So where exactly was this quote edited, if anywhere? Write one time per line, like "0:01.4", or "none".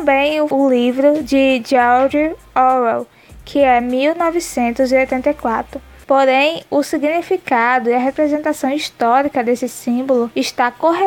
0:06.0